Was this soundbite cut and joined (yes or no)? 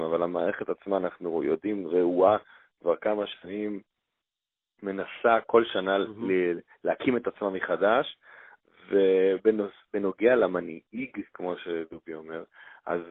no